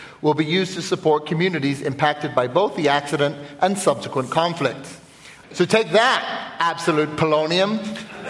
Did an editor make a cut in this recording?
yes; 1 cut; at 5.4 s

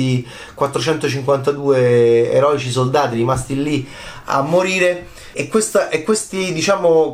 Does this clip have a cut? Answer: yes; 1 cut; at 5.3 s

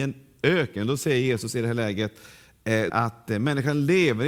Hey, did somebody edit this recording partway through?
yes; 1 cut; at 2.9 s

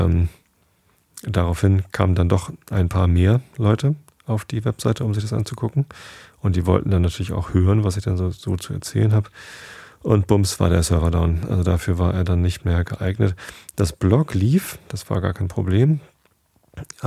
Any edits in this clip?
no; 0 cuts

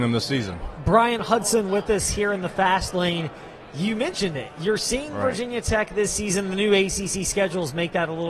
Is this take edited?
no; 0 cuts

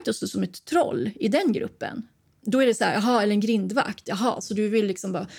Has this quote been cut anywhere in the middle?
no; 0 cuts

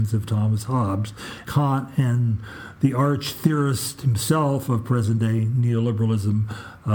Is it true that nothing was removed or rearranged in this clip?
no; 1 cut; at 1.5 s

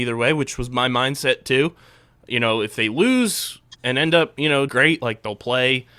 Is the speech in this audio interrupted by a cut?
yes; 1 cut; at 4.7 s

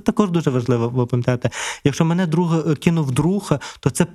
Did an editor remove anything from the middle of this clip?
no; 0 cuts

